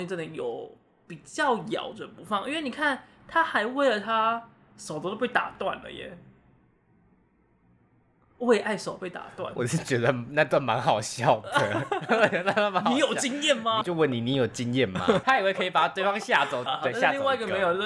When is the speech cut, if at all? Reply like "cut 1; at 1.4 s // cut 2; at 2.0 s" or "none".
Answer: cut 1; at 13.8 s // cut 2; at 15.2 s // cut 3; at 16.7 s